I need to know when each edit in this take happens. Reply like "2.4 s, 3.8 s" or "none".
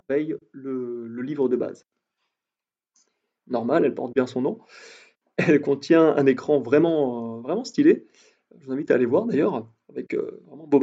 3.4 s